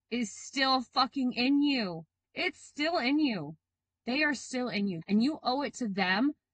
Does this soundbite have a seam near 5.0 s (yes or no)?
yes